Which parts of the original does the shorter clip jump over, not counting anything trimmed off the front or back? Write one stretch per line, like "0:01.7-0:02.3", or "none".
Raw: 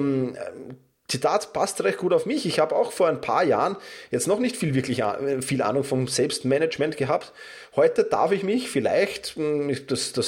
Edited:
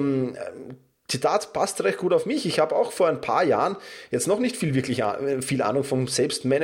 none